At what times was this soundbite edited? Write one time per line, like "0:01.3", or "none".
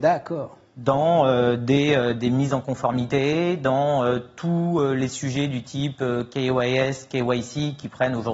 none